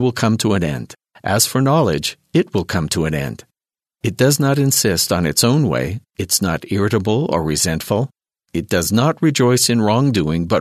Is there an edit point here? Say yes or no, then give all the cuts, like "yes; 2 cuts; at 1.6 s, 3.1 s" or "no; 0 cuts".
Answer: yes; 3 cuts; at 1.1 s, 3.9 s, 6.1 s